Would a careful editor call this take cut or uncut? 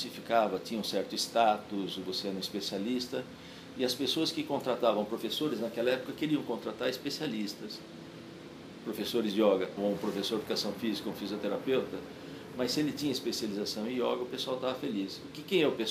cut